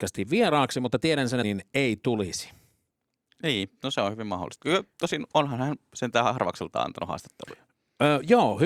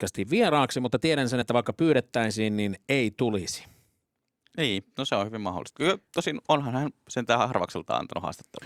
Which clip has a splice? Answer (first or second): first